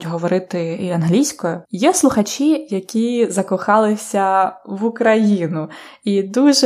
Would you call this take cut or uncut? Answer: cut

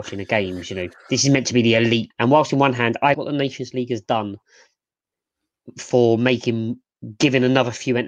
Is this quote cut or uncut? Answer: cut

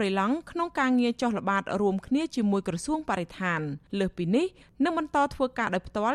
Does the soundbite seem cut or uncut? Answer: cut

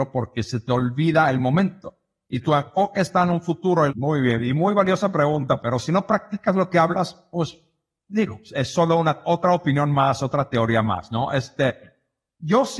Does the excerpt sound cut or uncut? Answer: cut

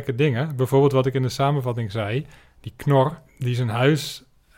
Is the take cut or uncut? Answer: uncut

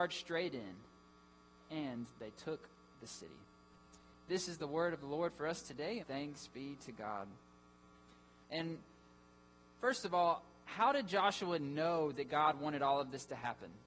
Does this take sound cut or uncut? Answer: cut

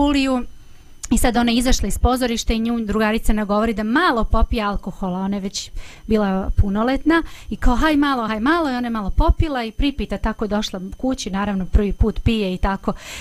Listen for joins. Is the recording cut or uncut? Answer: uncut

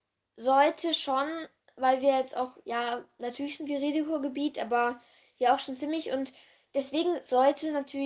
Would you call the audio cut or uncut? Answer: uncut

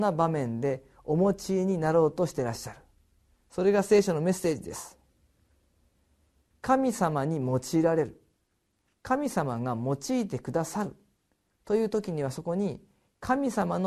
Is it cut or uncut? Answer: uncut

